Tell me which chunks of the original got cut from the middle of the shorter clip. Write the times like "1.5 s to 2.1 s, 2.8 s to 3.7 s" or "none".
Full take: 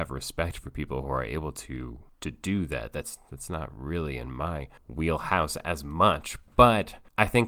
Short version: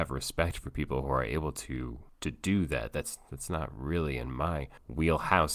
none